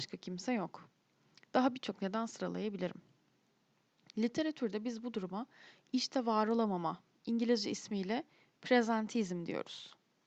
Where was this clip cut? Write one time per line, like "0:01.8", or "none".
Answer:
none